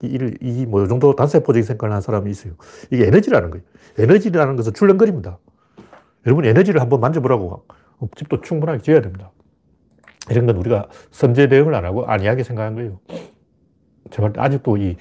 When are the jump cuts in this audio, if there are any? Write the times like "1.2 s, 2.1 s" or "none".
8.1 s

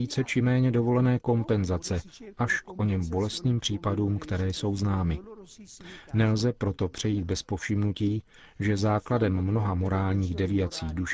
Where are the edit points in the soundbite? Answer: none

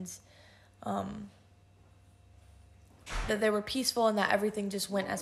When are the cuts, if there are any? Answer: 3.3 s

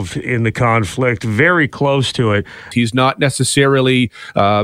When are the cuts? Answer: 2.7 s

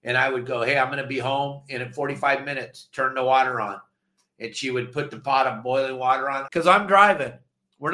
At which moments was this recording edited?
6.5 s

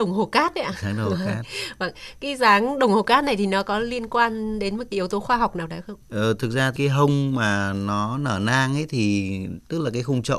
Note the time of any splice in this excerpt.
6.0 s

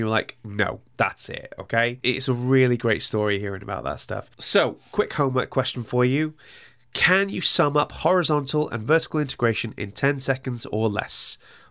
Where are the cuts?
0.9 s

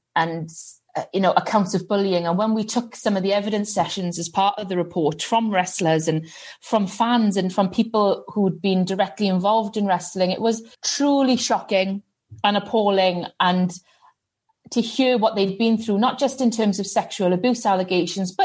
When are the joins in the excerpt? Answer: 10.7 s

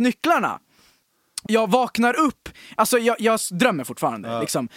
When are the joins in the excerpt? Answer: 1.5 s

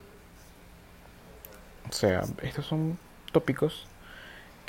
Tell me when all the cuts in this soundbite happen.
none

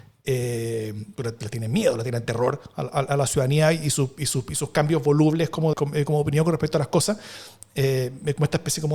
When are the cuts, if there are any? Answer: 5.7 s

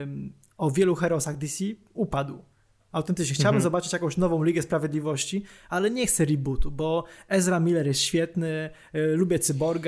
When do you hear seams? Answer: none

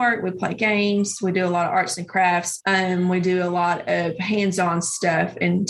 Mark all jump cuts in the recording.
2.6 s

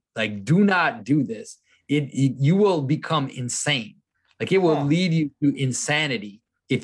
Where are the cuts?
none

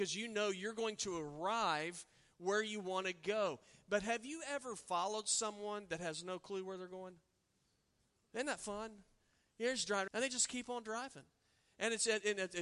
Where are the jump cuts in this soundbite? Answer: 10.1 s

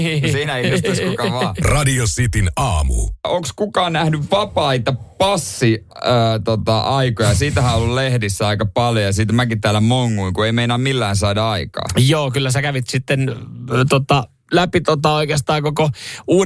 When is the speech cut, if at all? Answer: 14.4 s

